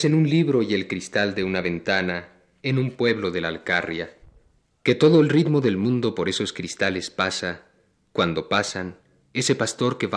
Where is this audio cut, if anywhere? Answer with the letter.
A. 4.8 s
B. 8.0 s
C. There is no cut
A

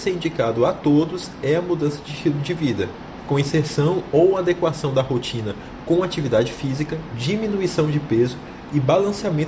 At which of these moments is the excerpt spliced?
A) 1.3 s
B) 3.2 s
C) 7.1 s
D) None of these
C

